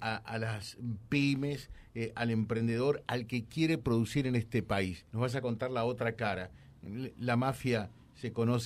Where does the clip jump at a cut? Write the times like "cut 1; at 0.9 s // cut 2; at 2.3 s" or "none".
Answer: cut 1; at 5.1 s